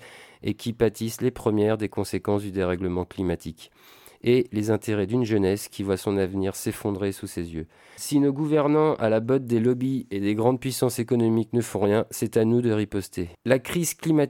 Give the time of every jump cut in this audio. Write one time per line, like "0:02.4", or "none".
0:08.0
0:13.3